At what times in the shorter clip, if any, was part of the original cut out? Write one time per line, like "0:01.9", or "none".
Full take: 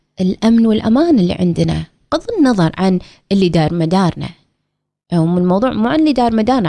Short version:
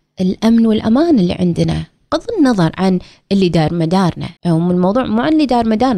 0:04.4